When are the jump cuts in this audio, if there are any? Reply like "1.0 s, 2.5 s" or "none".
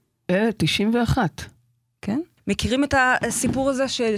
2.4 s